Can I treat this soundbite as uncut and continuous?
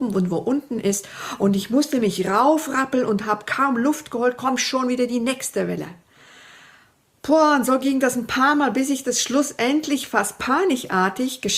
yes; 0 cuts

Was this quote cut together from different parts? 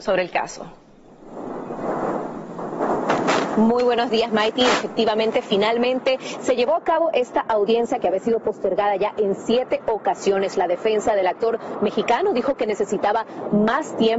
no; 0 cuts

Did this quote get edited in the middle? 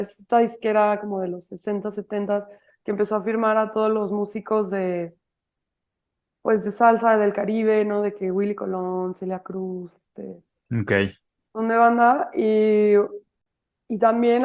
no; 0 cuts

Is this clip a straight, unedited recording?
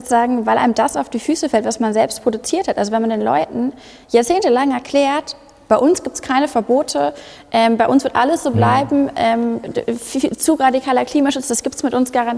yes; 0 cuts

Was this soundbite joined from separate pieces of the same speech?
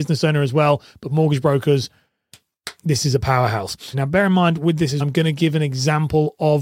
yes; 2 cuts; at 3.9 s, 5.0 s

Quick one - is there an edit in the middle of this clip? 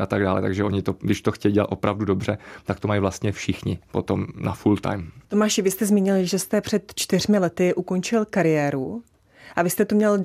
yes; 1 cut; at 5.2 s

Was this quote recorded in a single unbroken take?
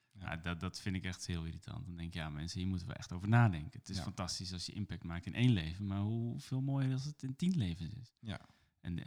yes; 0 cuts

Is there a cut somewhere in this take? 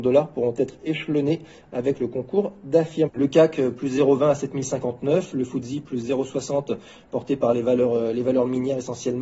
yes; 1 cut; at 3.1 s

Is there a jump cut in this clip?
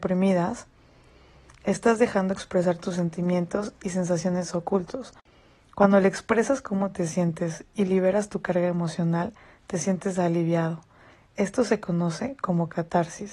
no; 0 cuts

